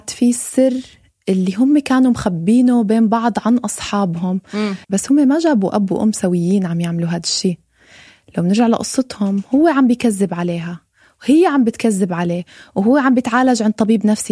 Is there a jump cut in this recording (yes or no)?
yes